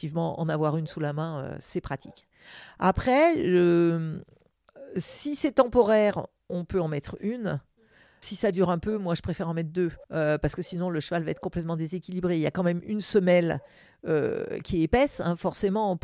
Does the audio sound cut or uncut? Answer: cut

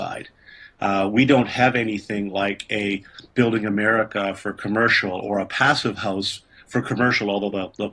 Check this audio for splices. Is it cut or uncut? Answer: uncut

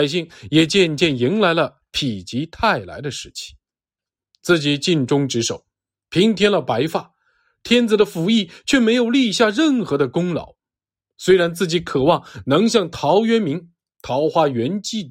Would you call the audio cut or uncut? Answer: uncut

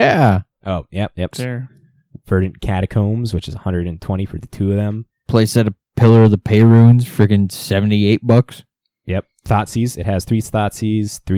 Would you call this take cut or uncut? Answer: cut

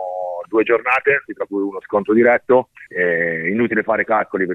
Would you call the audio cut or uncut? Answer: cut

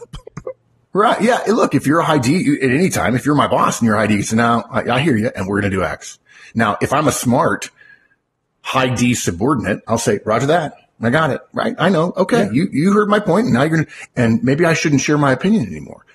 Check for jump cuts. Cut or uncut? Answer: cut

